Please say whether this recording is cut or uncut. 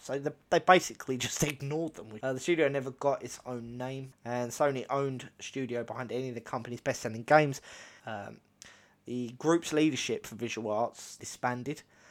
cut